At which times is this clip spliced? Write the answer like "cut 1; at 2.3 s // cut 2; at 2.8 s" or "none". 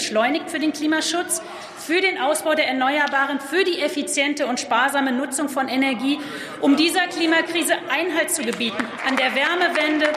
cut 1; at 9.0 s